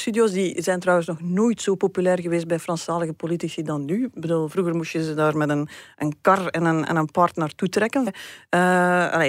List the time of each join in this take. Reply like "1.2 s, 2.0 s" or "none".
8.1 s